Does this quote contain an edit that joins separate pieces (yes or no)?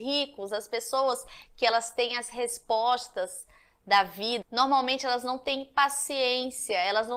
yes